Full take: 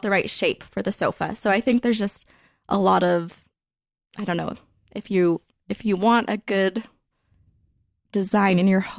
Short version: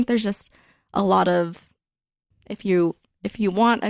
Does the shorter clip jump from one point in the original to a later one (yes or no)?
yes